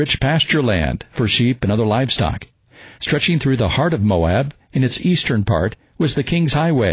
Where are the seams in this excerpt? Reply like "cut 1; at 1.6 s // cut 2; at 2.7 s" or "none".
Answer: cut 1; at 3.0 s

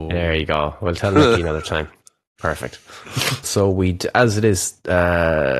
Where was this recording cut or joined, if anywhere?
cut 1; at 3.4 s

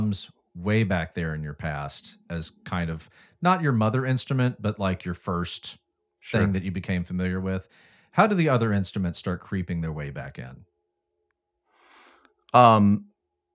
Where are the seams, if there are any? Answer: none

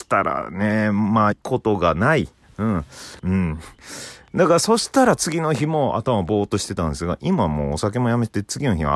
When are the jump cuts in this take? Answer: cut 1; at 1.3 s // cut 2; at 3.2 s

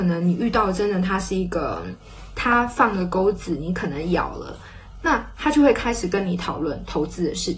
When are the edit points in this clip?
cut 1; at 2.3 s

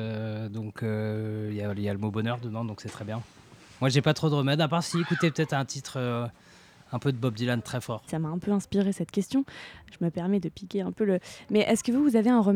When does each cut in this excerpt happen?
cut 1; at 8.1 s

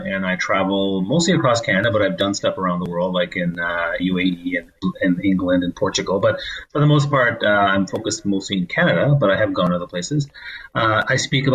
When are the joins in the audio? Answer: cut 1; at 4.0 s

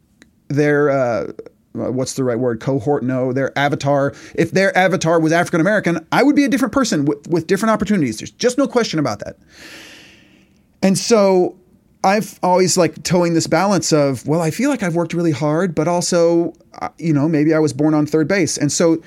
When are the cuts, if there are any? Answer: none

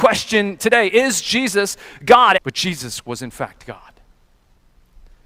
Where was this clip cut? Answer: cut 1; at 2.4 s

